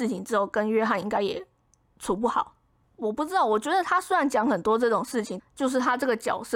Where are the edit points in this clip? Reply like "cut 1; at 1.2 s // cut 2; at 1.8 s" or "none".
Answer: cut 1; at 5.4 s